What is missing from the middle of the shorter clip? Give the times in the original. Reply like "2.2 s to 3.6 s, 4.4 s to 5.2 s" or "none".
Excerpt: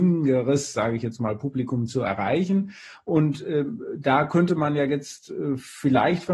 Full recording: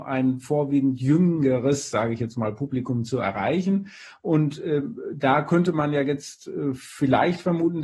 none

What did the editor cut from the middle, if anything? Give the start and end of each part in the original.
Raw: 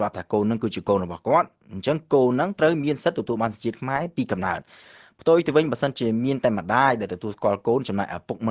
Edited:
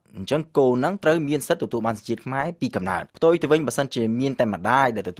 4.7 s to 5.1 s

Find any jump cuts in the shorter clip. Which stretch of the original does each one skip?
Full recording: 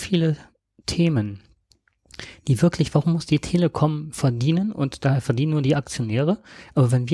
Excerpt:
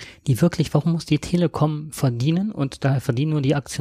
none

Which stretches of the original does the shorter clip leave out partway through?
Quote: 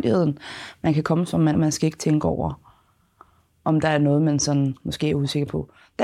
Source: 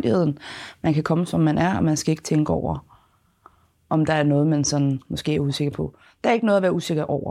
1.5 s to 1.8 s

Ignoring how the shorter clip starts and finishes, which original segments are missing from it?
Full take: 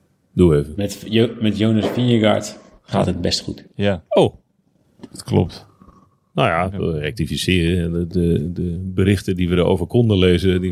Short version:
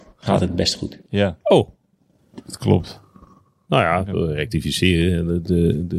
none

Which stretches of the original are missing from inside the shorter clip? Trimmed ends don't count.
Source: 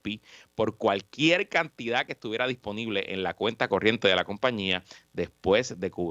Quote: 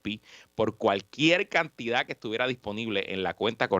none

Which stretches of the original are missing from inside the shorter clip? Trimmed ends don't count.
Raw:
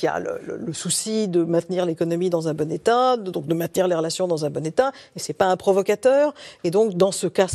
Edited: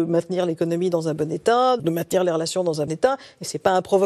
3.2 s to 3.4 s, 4.5 s to 4.6 s

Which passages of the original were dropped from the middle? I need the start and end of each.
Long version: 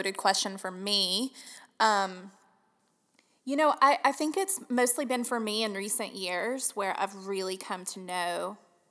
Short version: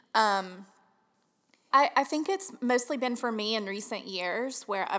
3.4 s to 3.8 s

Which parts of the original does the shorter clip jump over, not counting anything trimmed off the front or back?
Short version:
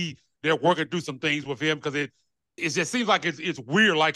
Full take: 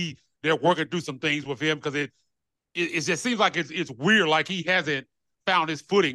2.6 s to 2.9 s

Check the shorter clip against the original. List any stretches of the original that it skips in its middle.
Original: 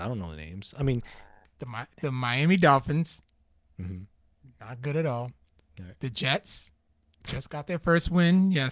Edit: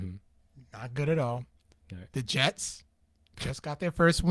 none

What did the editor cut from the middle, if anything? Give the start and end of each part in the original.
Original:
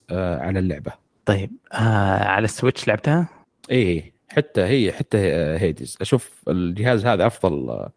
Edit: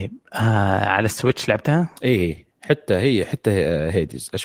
3.4 s to 3.6 s

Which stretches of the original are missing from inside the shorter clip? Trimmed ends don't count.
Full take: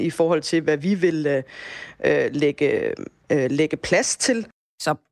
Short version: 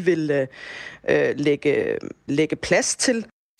3.2 s to 3.5 s

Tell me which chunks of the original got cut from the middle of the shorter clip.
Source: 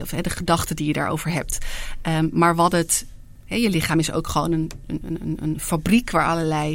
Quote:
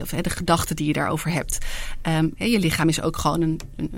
2.3 s to 3.4 s

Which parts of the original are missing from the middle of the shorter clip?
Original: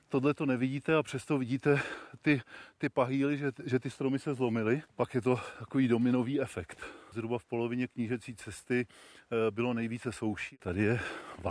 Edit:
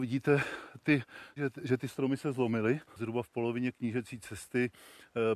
2.7 s to 3.4 s, 4.9 s to 7.0 s

